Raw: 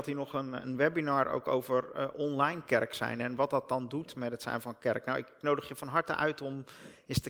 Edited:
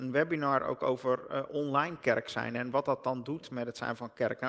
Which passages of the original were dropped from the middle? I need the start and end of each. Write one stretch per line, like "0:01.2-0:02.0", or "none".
none